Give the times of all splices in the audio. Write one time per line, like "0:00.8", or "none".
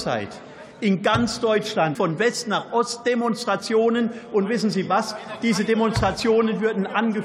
0:02.0